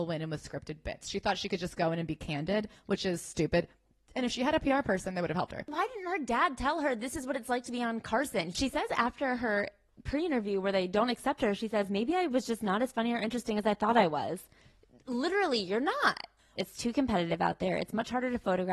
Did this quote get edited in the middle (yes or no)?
yes